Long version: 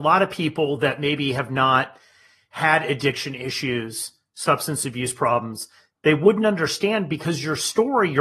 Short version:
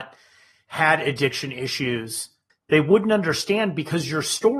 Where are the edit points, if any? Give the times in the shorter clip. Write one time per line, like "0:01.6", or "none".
0:02.5